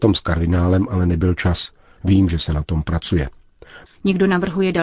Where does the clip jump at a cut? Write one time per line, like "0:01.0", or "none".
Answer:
0:02.0
0:03.9